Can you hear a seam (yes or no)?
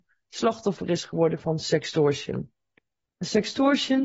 no